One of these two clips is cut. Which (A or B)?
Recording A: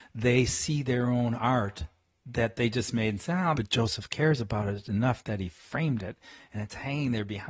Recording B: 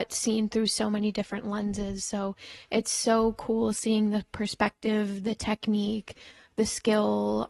A